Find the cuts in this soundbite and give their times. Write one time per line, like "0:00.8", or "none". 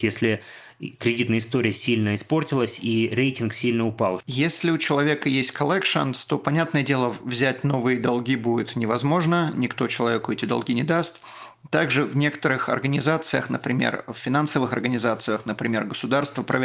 0:04.2